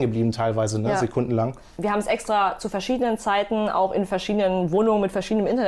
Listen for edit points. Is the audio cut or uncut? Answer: uncut